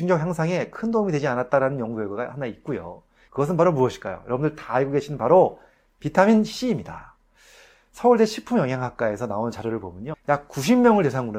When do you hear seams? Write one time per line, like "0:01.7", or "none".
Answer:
0:03.3